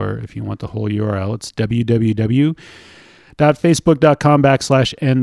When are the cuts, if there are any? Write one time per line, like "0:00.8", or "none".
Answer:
none